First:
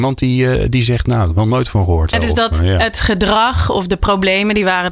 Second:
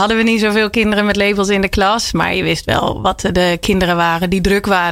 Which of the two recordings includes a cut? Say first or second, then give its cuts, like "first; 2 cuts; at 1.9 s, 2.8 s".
first; 1 cut; at 2.1 s